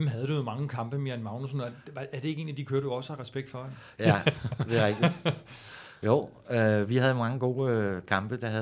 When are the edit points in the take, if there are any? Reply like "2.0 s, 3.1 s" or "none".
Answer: 4.0 s